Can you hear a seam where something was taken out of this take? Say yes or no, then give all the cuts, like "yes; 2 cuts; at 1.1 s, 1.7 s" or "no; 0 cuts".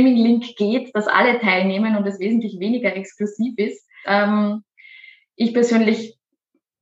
yes; 1 cut; at 4.0 s